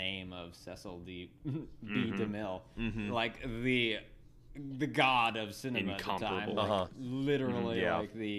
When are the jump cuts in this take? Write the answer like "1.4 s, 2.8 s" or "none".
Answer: none